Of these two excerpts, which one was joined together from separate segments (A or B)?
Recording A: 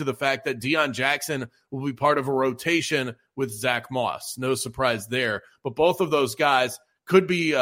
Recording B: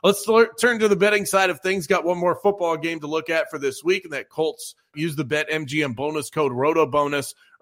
B